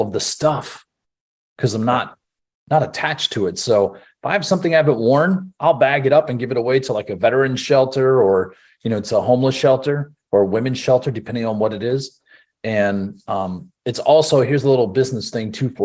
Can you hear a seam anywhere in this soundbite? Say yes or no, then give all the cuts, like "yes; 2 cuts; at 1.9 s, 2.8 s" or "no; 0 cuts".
no; 0 cuts